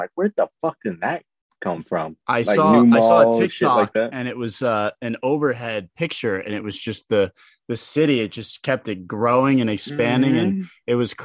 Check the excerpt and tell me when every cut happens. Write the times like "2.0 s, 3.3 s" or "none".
2.2 s